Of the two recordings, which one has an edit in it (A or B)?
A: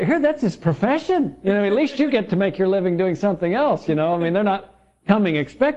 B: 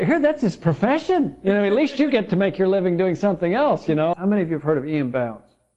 B